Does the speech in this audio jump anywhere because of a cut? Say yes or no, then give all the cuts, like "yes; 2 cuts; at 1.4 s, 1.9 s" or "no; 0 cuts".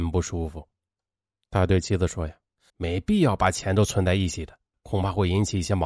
yes; 2 cuts; at 2.7 s, 4.7 s